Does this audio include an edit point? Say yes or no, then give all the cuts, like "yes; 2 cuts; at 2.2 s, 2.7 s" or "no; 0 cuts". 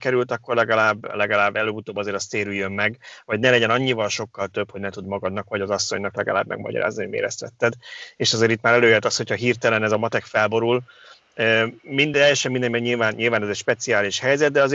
no; 0 cuts